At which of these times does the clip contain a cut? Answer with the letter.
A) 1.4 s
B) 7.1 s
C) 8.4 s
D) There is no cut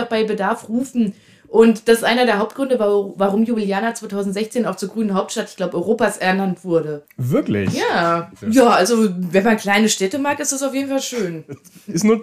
C